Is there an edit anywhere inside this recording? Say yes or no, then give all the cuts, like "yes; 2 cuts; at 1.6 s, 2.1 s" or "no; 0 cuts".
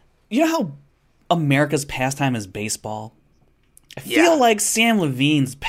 no; 0 cuts